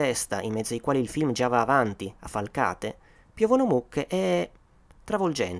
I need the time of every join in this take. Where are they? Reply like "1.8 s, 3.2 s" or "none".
none

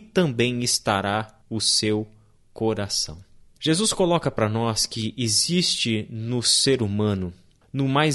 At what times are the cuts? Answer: none

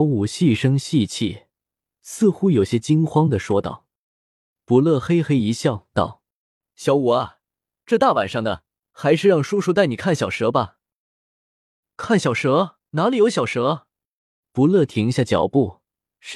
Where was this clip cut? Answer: 8.8 s, 12.9 s, 14.4 s

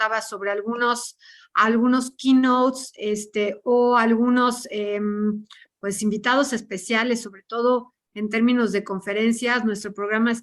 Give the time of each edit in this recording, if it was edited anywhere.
none

